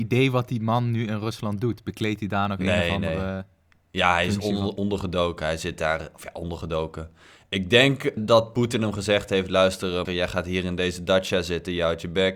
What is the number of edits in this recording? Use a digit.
2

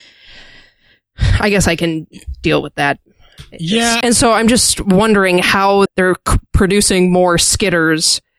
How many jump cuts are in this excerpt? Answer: 2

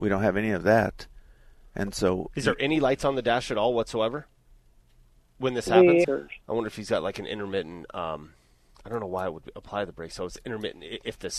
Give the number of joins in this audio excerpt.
1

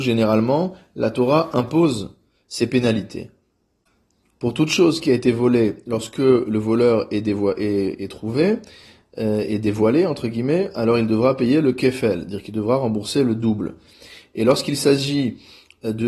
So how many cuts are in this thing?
0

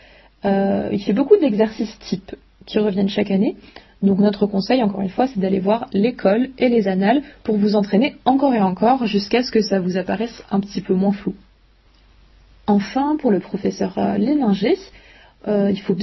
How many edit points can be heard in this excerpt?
0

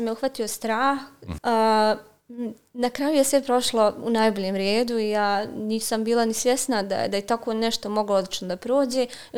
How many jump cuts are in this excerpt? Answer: 1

